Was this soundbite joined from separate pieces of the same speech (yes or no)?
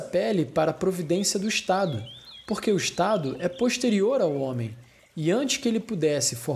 no